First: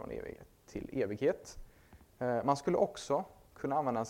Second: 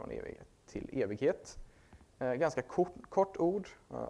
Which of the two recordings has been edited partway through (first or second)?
first